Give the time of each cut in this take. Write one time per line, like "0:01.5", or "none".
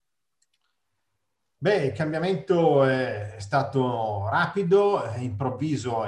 none